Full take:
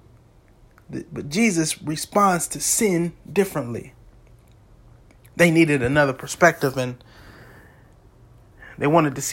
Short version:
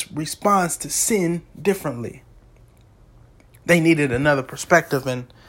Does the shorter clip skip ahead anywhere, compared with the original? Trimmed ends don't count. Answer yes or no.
no